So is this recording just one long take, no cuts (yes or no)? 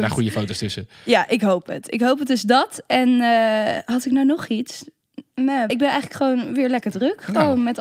no